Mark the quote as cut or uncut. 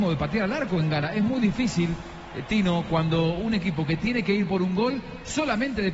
uncut